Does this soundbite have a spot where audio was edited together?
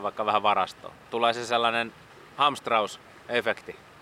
no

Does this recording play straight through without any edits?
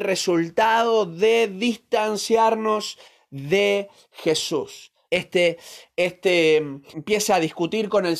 no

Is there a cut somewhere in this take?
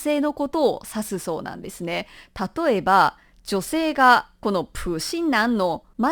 no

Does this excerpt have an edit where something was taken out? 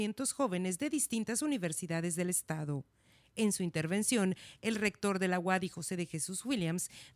no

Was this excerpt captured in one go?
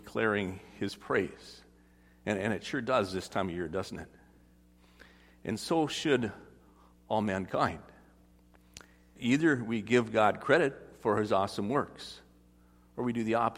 no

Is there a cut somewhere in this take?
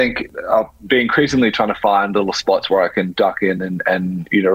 no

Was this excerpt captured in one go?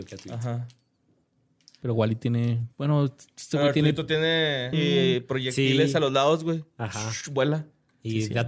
no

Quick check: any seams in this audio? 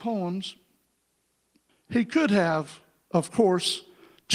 yes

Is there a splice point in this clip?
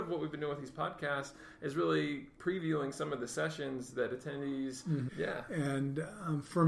yes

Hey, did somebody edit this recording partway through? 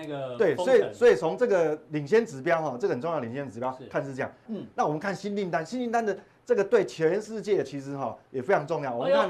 yes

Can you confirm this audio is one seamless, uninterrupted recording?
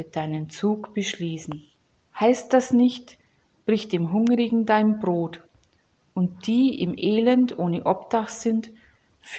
no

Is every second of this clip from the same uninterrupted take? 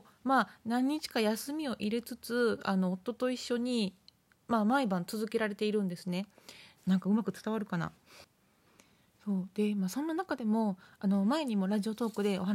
no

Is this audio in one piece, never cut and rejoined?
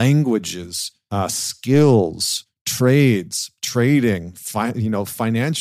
yes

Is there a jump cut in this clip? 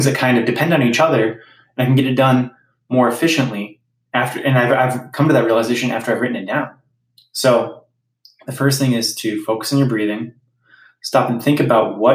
no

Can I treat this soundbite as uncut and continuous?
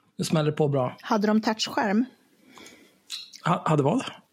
yes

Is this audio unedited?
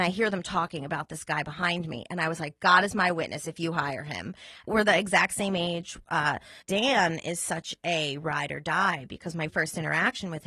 no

